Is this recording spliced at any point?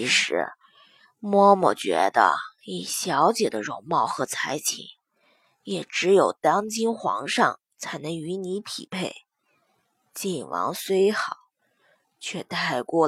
no; 0 cuts

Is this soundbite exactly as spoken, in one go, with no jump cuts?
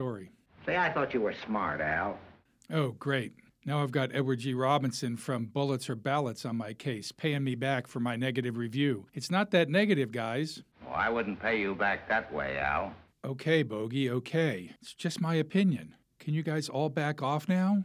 yes; 0 cuts

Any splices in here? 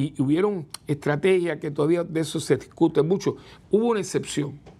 yes; 1 cut; at 3.6 s

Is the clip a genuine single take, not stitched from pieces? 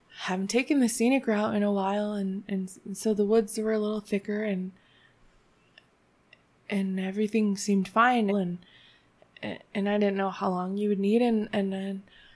no; 1 cut; at 8.3 s

